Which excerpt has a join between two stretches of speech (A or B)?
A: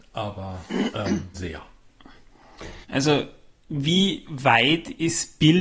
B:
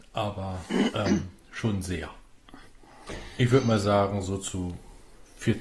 A